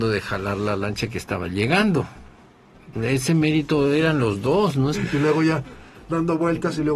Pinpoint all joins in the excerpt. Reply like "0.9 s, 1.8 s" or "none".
2.9 s, 4.9 s